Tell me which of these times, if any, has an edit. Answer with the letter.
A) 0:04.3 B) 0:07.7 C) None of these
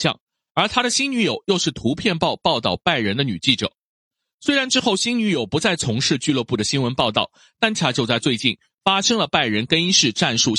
B